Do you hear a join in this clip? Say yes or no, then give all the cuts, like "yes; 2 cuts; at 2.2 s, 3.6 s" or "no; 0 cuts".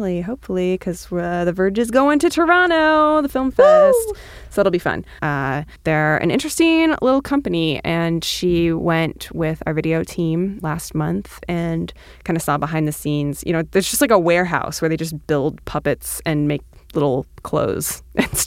yes; 2 cuts; at 5.2 s, 10.6 s